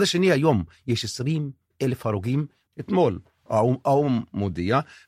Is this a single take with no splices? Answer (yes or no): no